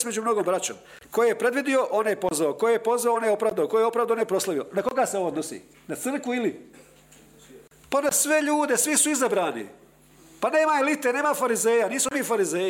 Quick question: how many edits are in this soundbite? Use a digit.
0